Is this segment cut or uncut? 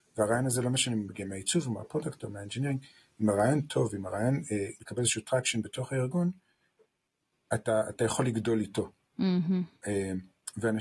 cut